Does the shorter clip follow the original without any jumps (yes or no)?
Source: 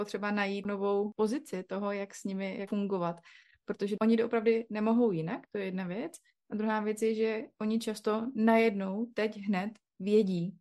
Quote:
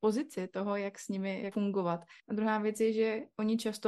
no